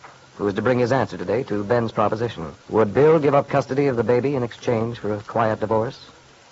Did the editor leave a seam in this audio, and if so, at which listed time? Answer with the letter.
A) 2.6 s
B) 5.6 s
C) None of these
A